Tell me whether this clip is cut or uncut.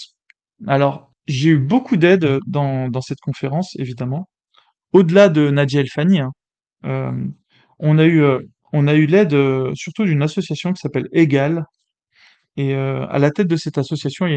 uncut